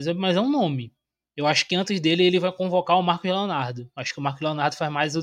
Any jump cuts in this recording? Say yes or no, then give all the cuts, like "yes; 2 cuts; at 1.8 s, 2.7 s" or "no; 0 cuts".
no; 0 cuts